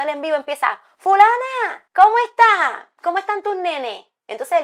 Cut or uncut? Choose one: cut